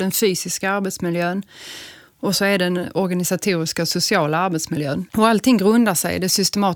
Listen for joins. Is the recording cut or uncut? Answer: cut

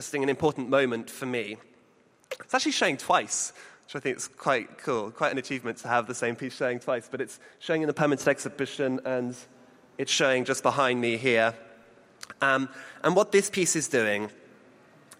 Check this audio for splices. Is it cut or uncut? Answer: cut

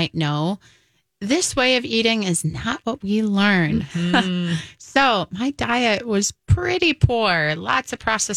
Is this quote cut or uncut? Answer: uncut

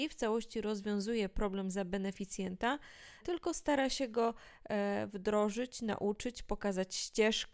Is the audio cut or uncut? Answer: cut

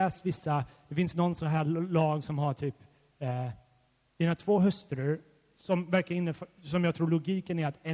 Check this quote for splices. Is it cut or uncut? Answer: uncut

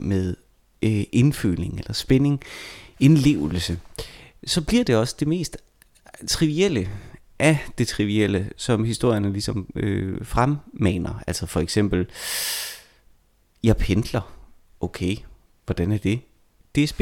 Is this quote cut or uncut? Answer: uncut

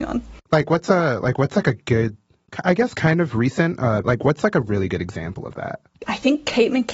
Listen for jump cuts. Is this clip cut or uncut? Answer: cut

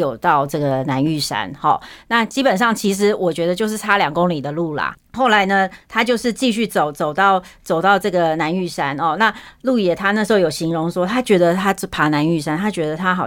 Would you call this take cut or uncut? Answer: uncut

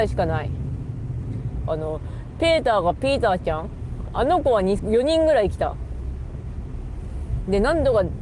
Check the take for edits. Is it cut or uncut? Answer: cut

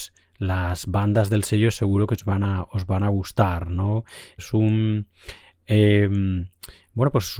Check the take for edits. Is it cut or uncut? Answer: cut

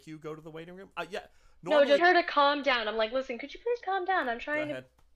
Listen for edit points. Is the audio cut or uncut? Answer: cut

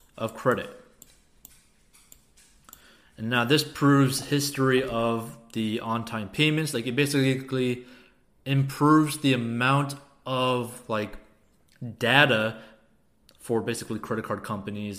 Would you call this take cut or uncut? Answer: uncut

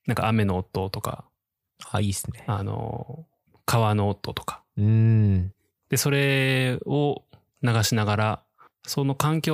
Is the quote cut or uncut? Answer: uncut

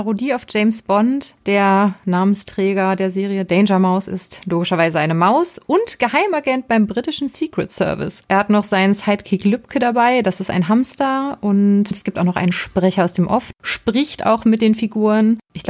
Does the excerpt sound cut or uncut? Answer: cut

